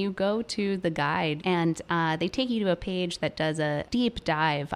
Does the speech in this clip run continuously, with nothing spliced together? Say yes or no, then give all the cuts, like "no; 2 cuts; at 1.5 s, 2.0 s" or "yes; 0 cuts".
no; 2 cuts; at 1.4 s, 3.8 s